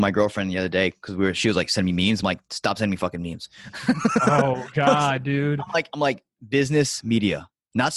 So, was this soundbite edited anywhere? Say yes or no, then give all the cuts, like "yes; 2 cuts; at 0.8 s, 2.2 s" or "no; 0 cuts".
no; 0 cuts